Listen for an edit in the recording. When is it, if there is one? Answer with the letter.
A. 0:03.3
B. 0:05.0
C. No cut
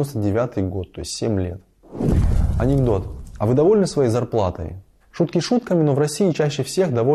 B